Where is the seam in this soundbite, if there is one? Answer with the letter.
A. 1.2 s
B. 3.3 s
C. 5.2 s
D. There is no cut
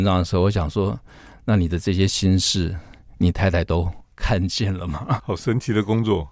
C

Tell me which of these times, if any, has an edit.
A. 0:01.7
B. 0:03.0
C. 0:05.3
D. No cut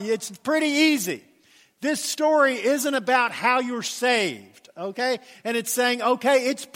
C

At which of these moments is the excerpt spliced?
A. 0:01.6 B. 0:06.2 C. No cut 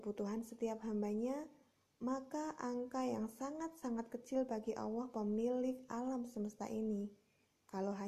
C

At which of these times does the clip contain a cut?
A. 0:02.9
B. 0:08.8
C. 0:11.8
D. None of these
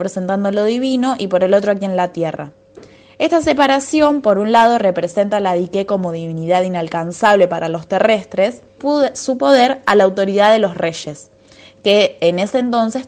B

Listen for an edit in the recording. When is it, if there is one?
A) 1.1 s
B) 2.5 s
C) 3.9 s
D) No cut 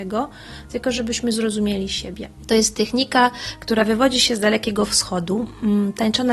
B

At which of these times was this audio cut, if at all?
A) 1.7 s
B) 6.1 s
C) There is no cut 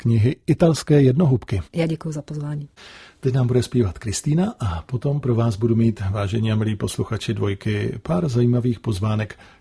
A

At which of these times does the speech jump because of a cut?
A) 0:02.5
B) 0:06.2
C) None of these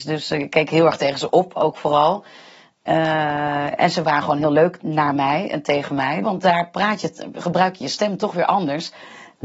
B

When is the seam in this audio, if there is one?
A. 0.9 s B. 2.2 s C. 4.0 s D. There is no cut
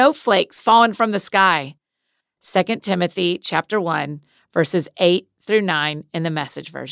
B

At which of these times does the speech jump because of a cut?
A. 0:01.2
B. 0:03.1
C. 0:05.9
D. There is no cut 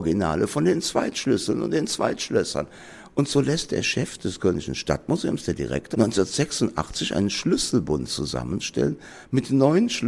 C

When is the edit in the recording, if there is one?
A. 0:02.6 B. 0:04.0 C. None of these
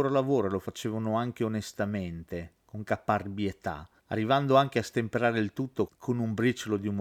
C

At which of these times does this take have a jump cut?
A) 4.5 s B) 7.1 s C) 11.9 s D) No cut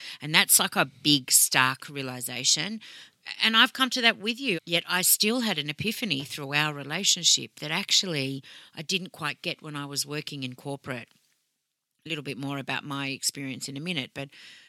A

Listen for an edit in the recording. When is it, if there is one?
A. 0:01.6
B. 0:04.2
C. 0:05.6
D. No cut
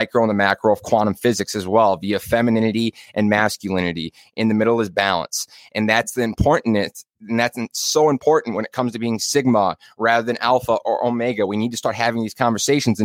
D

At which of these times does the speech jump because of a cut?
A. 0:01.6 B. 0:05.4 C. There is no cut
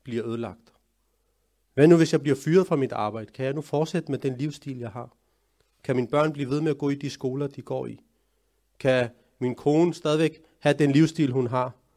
A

